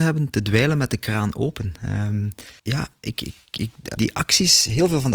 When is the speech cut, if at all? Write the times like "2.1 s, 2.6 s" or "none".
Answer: 2.6 s, 4.0 s